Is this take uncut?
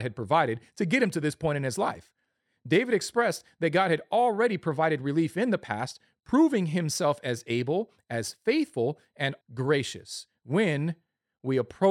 no; 1 cut; at 9.4 s

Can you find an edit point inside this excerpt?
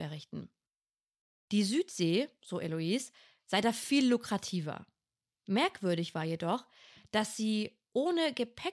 no; 0 cuts

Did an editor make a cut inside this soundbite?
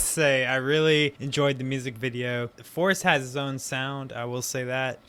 yes; 1 cut; at 2.5 s

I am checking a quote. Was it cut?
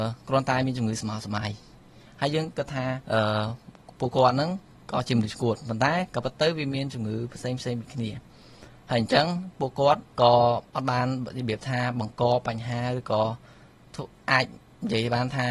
yes; 2 cuts; at 3.0 s, 10.1 s

